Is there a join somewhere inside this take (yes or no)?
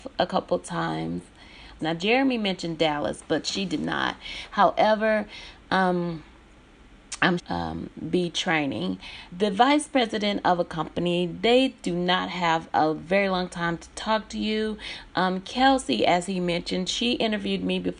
yes